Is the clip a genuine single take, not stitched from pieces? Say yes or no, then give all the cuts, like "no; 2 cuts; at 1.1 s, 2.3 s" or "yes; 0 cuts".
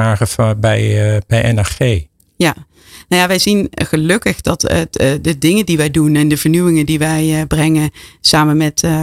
yes; 0 cuts